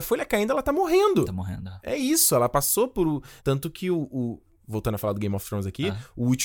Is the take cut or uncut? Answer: cut